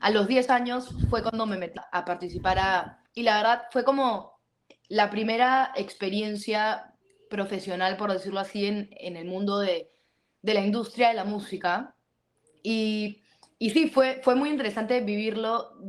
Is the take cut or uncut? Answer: cut